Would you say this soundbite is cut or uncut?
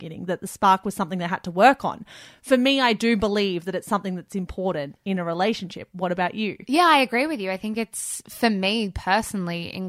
uncut